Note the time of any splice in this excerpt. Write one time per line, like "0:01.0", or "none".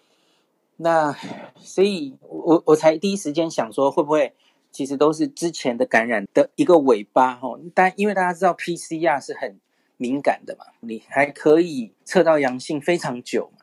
0:06.3
0:10.8
0:12.0